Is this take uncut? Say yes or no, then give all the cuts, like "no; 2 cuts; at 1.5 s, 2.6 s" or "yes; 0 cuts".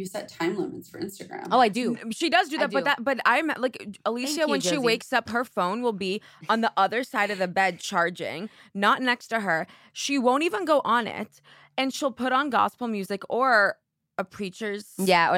yes; 0 cuts